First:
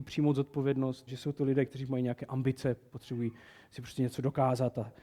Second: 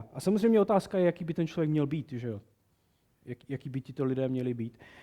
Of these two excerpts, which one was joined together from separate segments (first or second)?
first